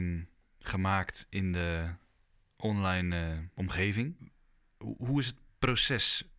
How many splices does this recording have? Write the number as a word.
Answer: zero